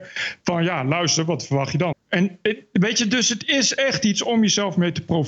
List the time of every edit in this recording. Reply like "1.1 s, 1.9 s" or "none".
1.9 s